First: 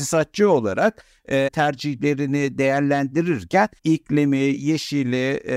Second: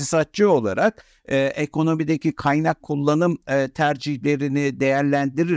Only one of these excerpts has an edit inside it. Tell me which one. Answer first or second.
first